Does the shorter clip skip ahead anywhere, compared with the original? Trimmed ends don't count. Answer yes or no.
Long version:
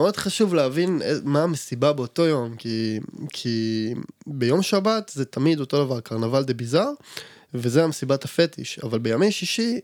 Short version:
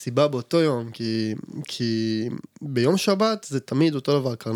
no